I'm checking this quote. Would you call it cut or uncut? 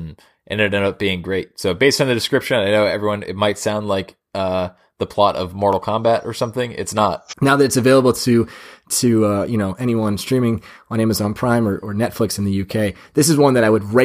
cut